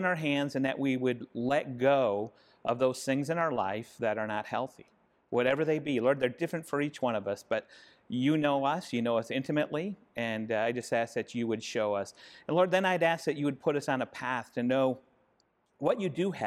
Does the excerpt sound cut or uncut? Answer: uncut